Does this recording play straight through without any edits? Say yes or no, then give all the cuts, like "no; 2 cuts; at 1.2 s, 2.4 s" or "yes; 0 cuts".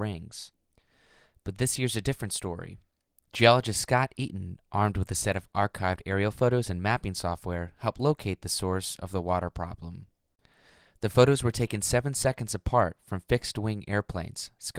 yes; 0 cuts